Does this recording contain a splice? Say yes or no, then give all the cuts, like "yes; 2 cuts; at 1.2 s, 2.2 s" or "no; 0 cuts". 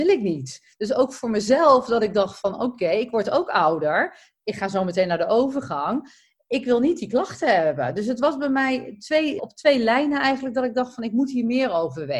yes; 1 cut; at 9.4 s